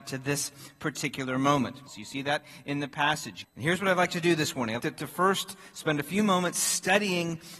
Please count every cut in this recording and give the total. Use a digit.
3